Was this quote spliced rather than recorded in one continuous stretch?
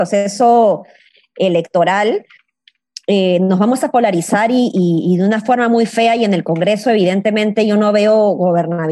no; 0 cuts

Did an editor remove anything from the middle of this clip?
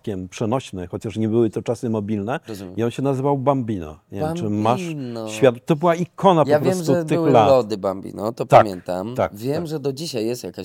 no; 0 cuts

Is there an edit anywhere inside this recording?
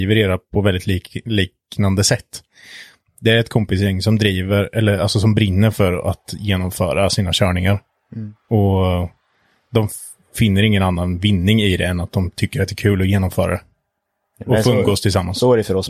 no; 0 cuts

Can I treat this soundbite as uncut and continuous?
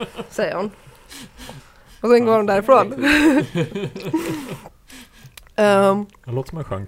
yes; 0 cuts

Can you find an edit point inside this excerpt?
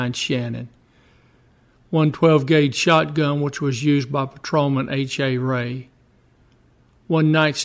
no; 0 cuts

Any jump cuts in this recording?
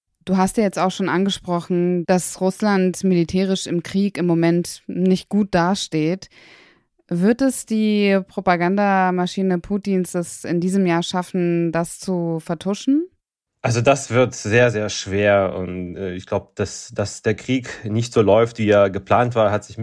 no; 0 cuts

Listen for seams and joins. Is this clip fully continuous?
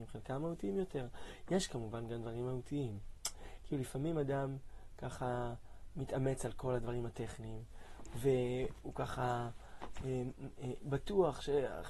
no; 1 cut; at 10.8 s

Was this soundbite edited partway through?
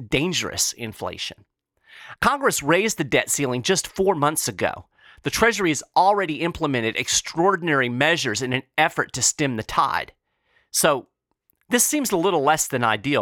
yes; 1 cut; at 2.1 s

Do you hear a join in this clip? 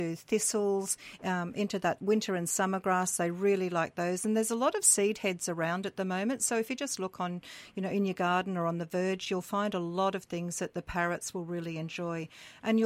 yes; 1 cut; at 1.2 s

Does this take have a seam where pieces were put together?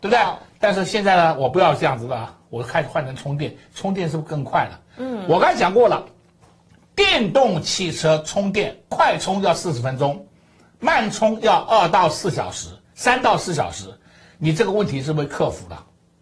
no; 0 cuts

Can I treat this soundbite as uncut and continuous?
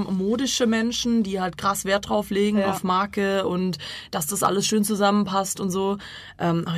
yes; 0 cuts

